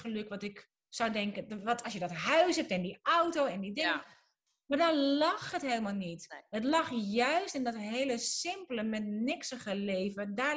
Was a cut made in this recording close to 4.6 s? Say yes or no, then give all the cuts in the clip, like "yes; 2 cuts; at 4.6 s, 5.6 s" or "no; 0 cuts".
no; 1 cut; at 1.8 s